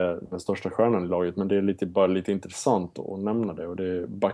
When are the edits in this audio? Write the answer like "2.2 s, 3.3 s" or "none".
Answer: none